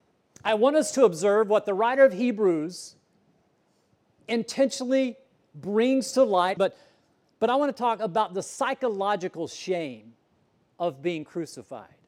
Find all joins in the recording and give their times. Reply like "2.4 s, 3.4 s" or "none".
6.6 s